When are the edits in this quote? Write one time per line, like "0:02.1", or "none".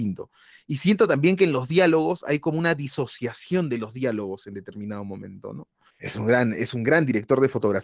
0:05.9